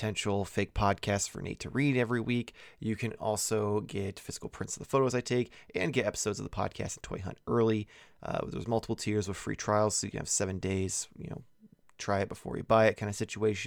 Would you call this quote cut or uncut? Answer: uncut